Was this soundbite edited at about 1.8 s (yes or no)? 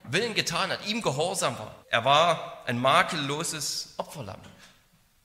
yes